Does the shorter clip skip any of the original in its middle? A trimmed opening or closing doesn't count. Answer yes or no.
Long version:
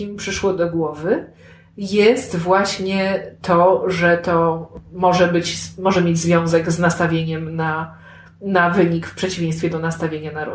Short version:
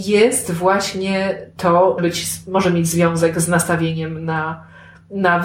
yes